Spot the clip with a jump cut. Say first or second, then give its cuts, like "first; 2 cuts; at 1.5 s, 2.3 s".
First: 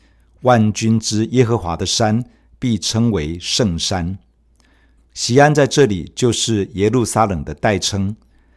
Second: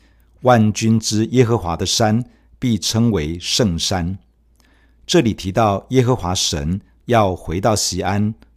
first; 1 cut; at 5.0 s